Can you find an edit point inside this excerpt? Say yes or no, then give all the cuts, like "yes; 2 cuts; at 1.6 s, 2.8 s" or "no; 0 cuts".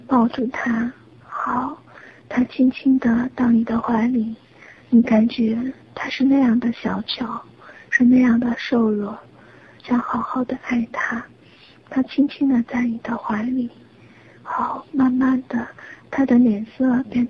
yes; 1 cut; at 9.8 s